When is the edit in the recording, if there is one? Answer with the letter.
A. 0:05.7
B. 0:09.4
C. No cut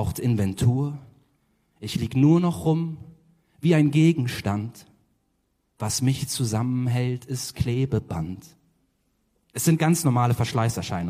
B